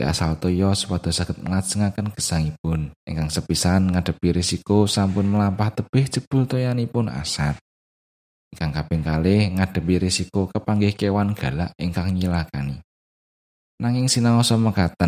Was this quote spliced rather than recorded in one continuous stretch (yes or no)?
yes